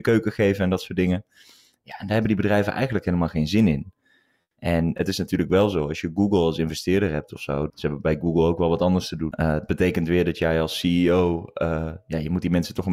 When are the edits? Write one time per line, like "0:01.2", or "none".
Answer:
0:07.7
0:09.3